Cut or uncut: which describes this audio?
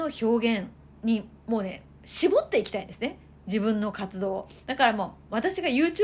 uncut